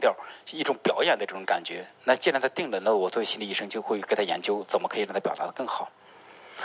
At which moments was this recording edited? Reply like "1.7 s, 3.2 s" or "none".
2.0 s